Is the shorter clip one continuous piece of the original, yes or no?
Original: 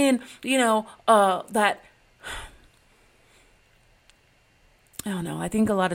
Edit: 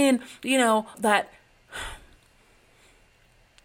no